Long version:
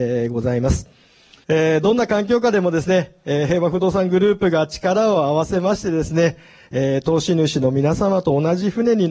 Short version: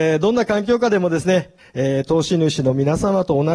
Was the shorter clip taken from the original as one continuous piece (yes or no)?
no